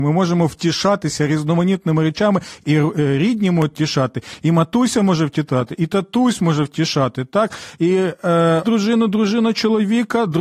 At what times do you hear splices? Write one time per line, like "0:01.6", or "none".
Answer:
0:02.6
0:08.6

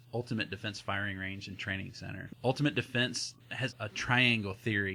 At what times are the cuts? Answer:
0:02.3
0:03.7

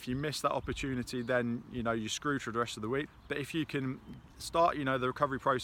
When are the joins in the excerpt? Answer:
0:03.1

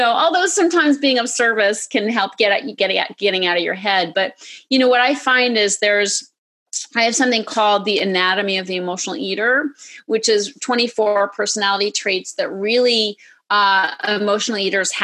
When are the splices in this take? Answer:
0:02.8

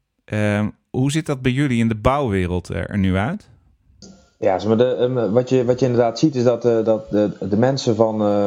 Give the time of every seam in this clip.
none

